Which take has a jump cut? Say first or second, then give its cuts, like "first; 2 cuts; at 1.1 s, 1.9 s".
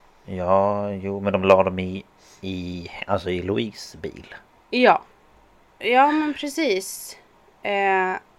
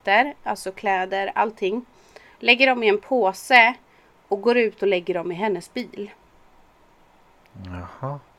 first; 1 cut; at 5.7 s